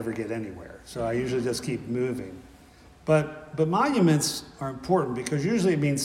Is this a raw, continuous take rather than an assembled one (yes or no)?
yes